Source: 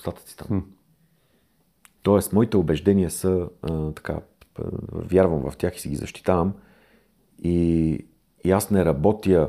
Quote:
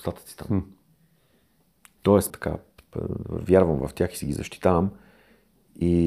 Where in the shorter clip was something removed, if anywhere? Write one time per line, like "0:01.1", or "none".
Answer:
0:02.3

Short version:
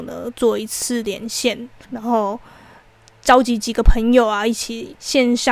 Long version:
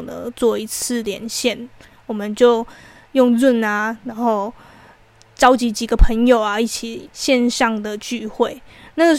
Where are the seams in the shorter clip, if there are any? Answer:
0:01.8

